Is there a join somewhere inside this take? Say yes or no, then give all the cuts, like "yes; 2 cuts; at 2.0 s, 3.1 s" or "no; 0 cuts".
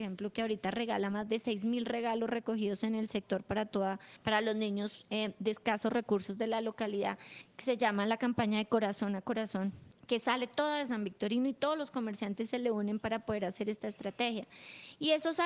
no; 0 cuts